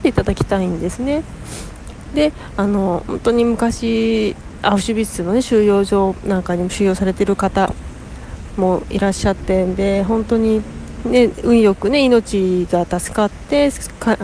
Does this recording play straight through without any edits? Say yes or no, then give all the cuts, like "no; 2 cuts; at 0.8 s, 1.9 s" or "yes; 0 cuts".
no; 1 cut; at 8.5 s